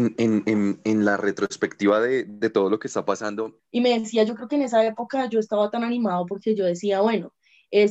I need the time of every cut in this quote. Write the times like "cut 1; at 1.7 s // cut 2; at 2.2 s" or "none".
cut 1; at 3.6 s